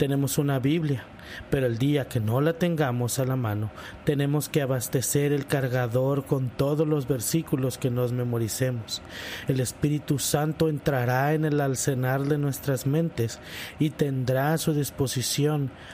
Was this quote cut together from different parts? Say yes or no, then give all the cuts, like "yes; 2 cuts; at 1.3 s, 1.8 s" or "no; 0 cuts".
no; 0 cuts